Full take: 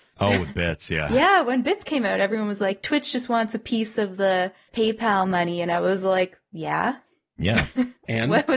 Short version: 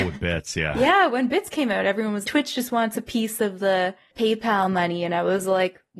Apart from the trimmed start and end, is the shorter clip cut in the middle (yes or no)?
yes